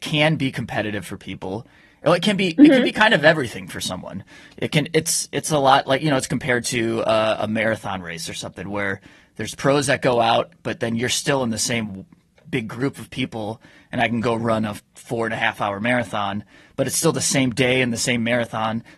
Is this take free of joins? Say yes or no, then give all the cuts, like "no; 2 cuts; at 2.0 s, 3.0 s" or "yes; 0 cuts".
yes; 0 cuts